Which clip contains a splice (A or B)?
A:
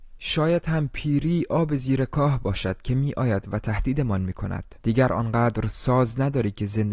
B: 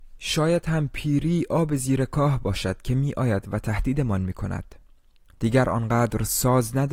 A